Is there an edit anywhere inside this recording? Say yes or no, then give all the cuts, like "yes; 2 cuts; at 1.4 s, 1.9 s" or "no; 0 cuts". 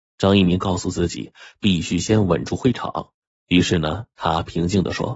no; 0 cuts